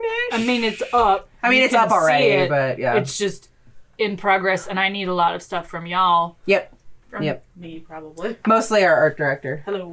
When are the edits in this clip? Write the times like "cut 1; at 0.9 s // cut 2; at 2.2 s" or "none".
none